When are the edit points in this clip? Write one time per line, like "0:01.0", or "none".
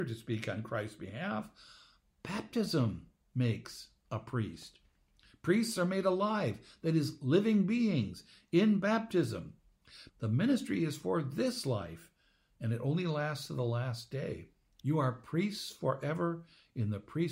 0:10.1
0:14.8